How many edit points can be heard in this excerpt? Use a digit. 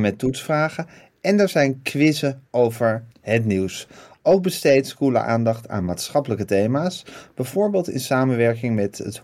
1